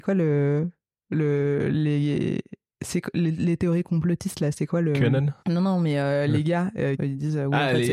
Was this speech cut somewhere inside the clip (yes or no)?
yes